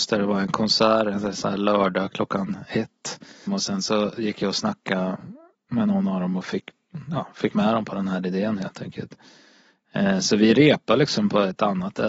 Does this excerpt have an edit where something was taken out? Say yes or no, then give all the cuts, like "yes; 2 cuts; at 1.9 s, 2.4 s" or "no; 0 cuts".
yes; 1 cut; at 3.5 s